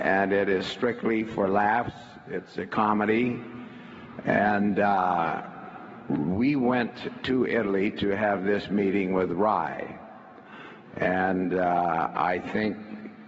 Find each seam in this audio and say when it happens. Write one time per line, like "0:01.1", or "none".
none

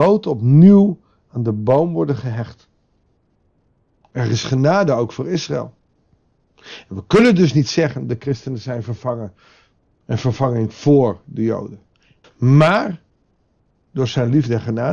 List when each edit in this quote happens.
0:12.2

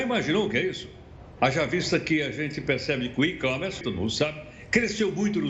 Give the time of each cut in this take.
0:01.4
0:03.8

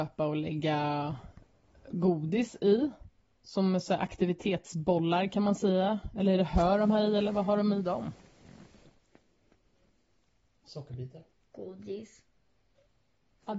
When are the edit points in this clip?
none

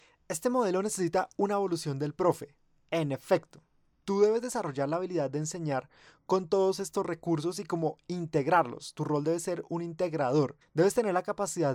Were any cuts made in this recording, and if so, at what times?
0:10.6

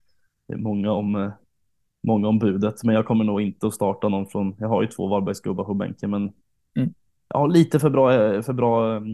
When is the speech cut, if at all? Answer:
none

